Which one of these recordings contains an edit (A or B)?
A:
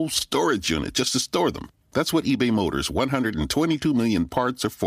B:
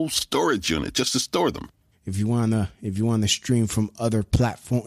B